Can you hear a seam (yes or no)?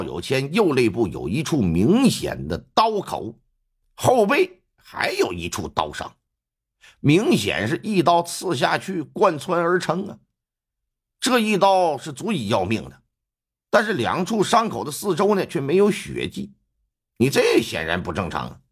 no